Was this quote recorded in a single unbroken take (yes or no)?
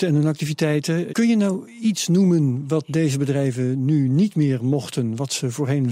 no